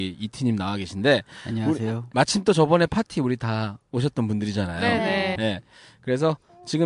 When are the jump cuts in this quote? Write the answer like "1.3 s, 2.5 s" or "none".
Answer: 5.4 s